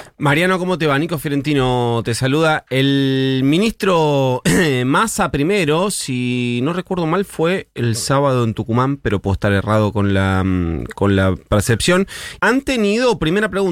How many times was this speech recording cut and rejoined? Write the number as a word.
one